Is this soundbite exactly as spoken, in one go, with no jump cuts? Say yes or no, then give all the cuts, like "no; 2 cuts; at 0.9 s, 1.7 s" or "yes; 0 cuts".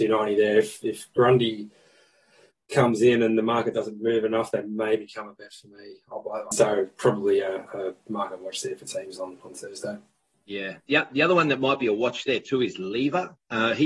no; 1 cut; at 6.5 s